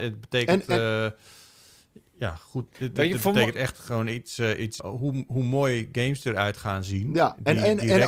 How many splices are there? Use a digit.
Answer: 2